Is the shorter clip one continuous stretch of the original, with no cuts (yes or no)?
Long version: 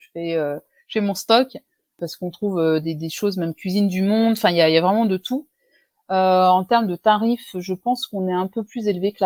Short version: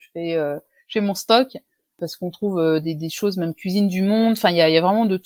yes